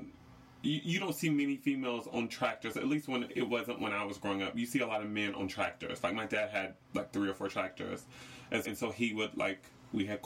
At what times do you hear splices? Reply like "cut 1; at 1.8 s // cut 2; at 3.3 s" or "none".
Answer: cut 1; at 8.6 s